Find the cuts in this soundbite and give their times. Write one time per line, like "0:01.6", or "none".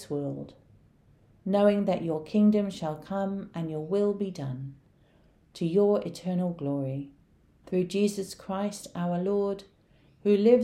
none